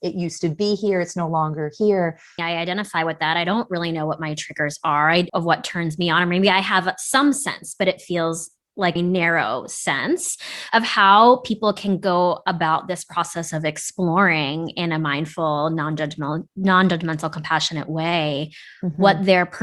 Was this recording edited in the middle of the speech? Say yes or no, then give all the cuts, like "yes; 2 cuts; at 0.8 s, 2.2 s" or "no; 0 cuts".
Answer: yes; 3 cuts; at 2.4 s, 5.3 s, 9.0 s